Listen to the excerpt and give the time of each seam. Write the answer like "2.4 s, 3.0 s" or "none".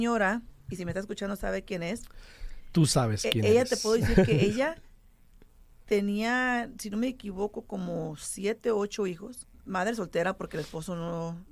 9.5 s